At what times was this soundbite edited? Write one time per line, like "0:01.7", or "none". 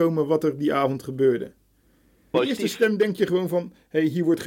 0:02.3